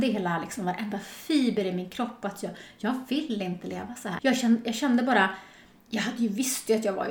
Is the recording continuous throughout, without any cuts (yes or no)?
no